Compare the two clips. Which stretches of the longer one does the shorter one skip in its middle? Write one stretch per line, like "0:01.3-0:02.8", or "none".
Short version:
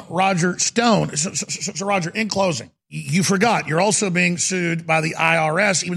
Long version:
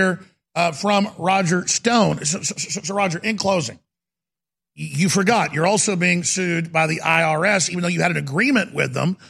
0:03.9-0:04.7